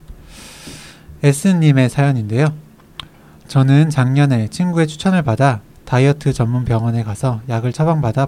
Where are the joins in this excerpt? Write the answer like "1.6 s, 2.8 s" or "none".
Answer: none